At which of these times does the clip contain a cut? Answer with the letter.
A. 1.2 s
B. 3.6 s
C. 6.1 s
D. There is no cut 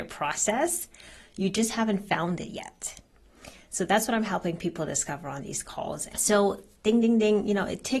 C